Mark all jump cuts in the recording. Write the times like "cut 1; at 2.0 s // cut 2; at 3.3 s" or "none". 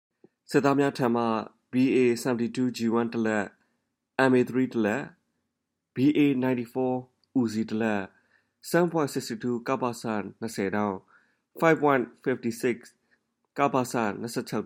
none